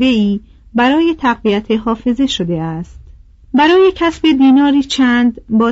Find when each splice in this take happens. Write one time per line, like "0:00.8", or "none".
0:03.4